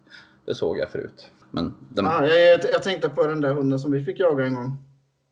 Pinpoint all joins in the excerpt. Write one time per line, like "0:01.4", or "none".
0:01.4